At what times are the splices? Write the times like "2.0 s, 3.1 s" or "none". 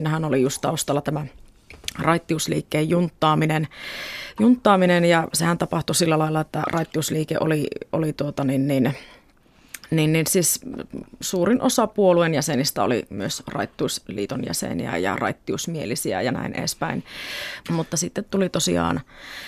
17.6 s